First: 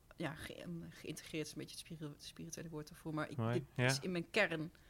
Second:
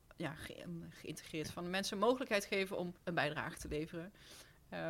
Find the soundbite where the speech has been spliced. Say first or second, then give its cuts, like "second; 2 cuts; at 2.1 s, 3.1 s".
second; 2 cuts; at 1.4 s, 3.0 s